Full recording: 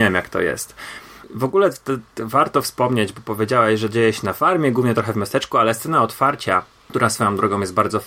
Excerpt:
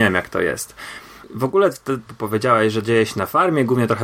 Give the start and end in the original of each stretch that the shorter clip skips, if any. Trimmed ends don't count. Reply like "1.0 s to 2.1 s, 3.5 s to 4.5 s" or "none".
2.1 s to 3.1 s